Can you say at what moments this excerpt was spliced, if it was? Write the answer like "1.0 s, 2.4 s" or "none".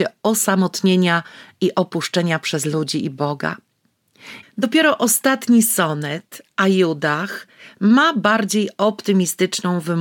4.4 s

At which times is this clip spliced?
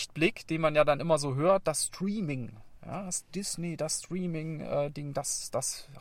none

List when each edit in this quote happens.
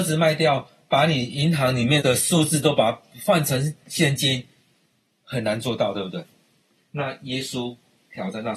2.0 s, 5.1 s, 6.8 s

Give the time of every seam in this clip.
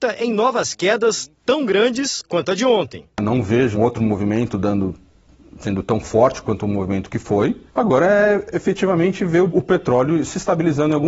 3.7 s, 7.7 s

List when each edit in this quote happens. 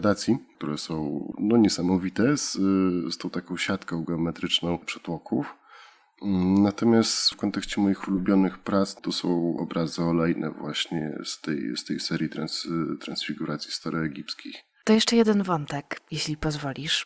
none

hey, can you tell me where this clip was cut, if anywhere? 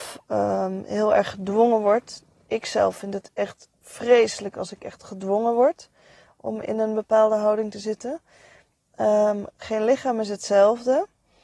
none

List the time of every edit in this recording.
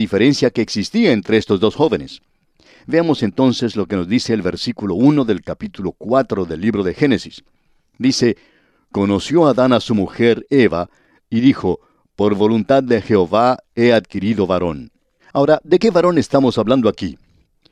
11.2 s, 15.2 s

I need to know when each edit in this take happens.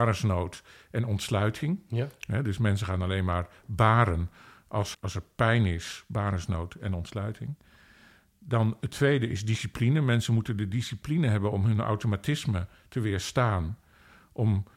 4.9 s

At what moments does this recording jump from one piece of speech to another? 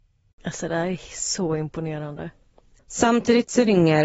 2.8 s

